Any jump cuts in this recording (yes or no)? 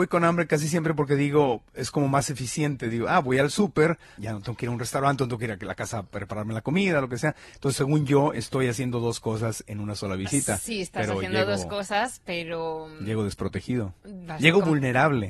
yes